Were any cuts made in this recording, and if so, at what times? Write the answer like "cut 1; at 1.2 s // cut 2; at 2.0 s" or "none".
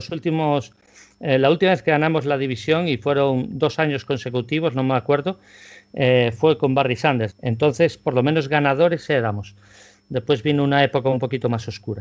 cut 1; at 7.3 s